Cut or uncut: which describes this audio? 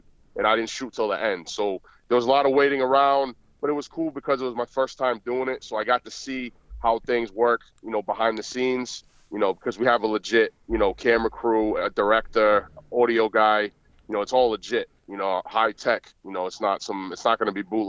uncut